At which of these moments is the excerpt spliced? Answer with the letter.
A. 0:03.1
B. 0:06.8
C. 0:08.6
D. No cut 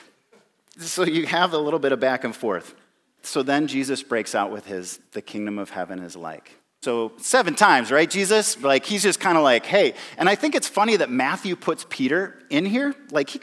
B